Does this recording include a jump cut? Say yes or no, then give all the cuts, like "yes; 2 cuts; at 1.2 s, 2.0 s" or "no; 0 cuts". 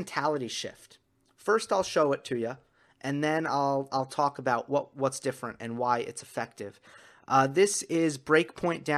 no; 0 cuts